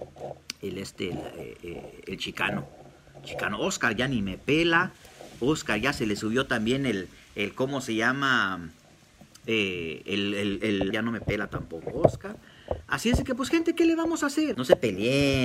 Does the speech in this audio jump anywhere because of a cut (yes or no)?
yes